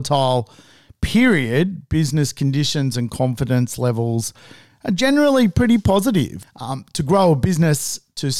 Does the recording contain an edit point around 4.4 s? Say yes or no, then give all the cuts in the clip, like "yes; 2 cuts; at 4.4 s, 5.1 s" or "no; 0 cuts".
no; 1 cut; at 6.4 s